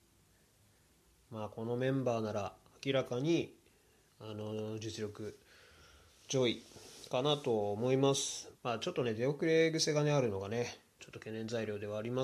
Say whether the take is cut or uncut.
cut